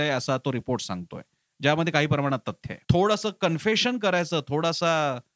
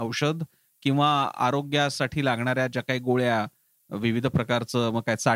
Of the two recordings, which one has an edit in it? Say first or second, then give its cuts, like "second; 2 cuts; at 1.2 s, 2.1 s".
first; 1 cut; at 2.8 s